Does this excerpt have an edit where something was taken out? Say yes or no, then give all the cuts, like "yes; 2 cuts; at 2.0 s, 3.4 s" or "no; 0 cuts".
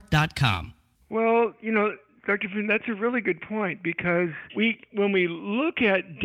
yes; 2 cuts; at 1.0 s, 4.5 s